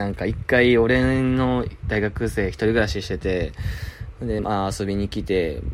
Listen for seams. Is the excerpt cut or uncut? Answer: uncut